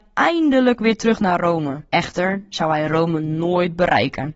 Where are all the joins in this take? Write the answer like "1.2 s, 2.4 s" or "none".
1.9 s